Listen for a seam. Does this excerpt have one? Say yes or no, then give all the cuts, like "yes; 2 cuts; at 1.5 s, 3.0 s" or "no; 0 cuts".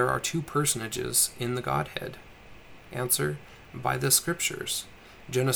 no; 0 cuts